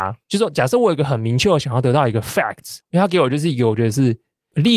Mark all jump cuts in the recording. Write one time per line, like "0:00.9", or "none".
0:02.8